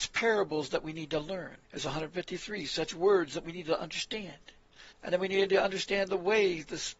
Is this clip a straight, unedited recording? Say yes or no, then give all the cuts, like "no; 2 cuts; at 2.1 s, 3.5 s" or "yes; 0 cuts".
no; 2 cuts; at 1.6 s, 4.9 s